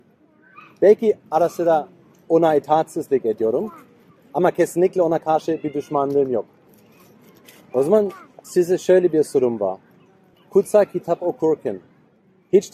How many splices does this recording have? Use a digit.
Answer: 0